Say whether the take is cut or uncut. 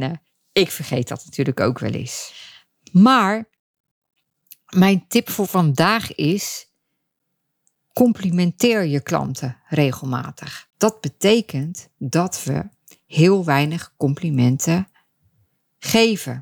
cut